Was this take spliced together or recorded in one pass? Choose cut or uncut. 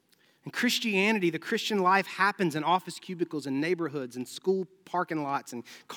uncut